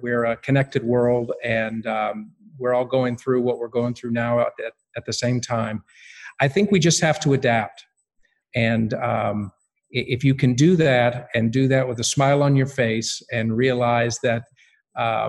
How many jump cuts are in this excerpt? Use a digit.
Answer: 1